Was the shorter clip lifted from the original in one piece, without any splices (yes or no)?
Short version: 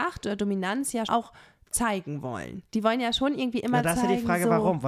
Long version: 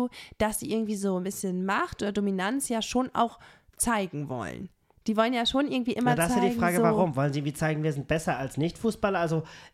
no